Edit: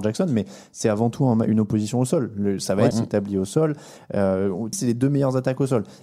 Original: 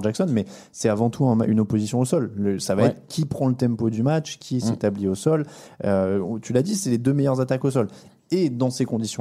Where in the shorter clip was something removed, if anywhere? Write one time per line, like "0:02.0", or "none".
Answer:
0:02.9
0:04.7